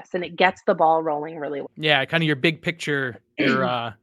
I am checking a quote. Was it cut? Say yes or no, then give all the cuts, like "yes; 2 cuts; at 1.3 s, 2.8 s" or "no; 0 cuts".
yes; 1 cut; at 1.6 s